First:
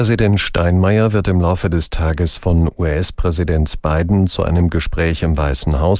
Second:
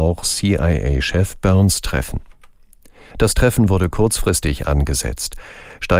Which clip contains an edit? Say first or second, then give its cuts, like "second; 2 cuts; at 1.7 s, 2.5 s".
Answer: second; 1 cut; at 3.1 s